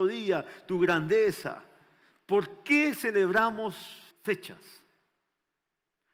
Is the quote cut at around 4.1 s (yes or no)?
yes